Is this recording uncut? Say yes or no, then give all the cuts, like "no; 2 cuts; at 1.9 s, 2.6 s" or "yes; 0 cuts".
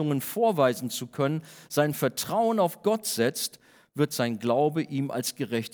yes; 0 cuts